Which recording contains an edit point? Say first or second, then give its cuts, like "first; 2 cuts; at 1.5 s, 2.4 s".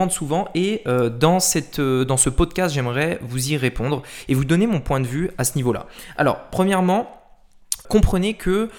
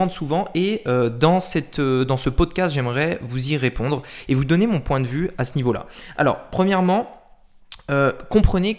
first; 1 cut; at 7.8 s